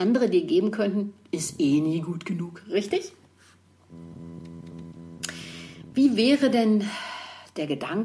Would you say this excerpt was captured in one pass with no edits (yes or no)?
yes